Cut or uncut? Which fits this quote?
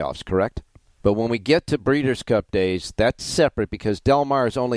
cut